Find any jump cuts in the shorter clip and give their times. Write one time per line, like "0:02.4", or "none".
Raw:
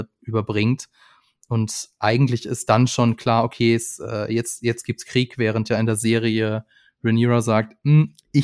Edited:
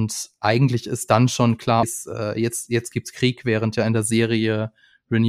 0:01.8